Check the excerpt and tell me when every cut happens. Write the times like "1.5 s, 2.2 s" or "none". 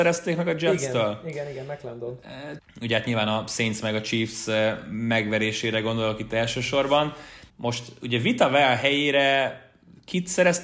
2.6 s, 7.5 s